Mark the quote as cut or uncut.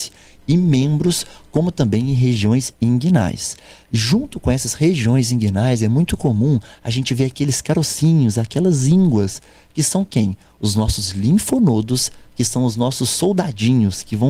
uncut